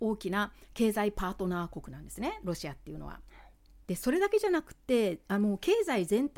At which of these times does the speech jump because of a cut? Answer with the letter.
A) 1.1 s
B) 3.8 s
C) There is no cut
B